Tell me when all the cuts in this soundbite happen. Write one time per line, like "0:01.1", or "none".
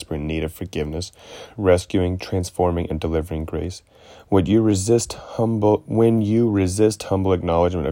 0:01.6